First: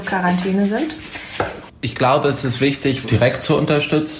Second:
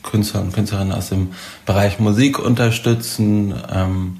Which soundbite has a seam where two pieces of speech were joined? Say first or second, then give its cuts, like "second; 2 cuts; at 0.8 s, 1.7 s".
first; 2 cuts; at 1.7 s, 3.0 s